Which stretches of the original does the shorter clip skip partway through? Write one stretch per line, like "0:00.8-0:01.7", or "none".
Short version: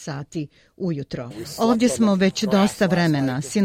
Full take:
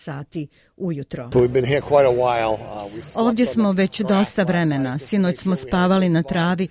0:01.3-0:02.9